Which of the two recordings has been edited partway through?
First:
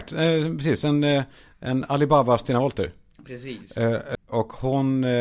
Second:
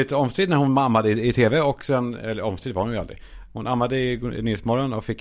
first; 1 cut; at 4.1 s

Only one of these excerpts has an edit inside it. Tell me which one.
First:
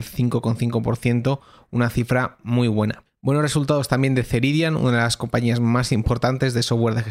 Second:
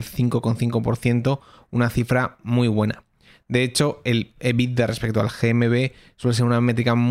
first; 1 cut; at 3.0 s

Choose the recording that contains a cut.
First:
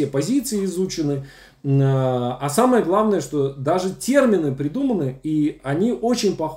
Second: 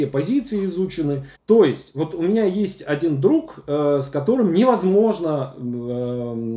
second; 1 cut; at 1.3 s

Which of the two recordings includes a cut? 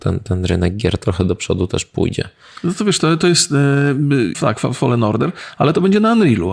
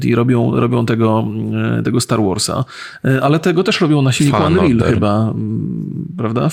first; 1 cut; at 4.3 s

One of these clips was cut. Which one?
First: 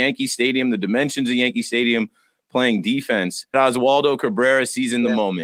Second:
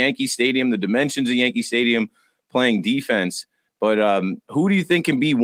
first; 1 cut; at 3.5 s

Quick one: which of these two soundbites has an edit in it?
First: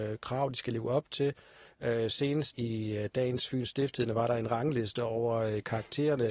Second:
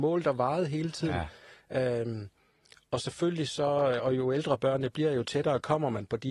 first; 1 cut; at 2.5 s

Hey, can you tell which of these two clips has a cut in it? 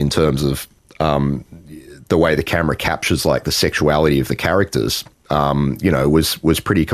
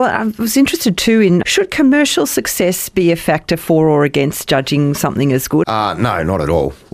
second; 2 cuts; at 1.4 s, 5.6 s

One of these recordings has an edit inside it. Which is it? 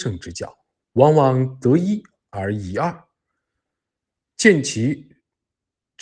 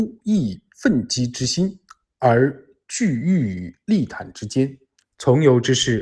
second; 1 cut; at 5.0 s

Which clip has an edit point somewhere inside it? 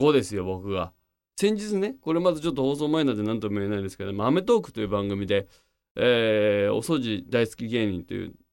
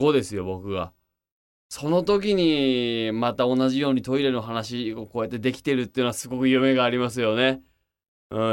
first; 1 cut; at 1.3 s

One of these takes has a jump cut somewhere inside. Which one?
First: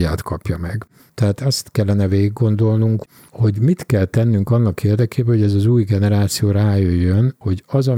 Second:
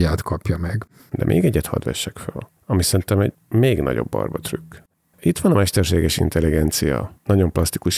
second; 1 cut; at 1.1 s

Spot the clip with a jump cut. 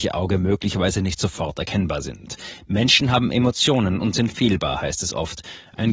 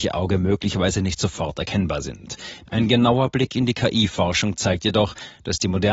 second; 1 cut; at 2.6 s

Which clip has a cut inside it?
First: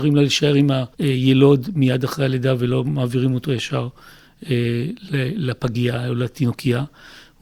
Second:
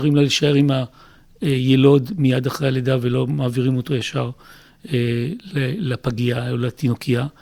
first; 1 cut; at 0.9 s

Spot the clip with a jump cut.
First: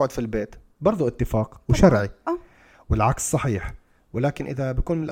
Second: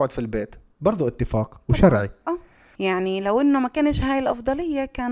second; 1 cut; at 2.7 s

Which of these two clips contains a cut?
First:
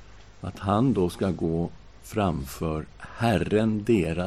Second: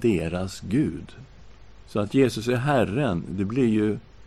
second; 1 cut; at 1.8 s

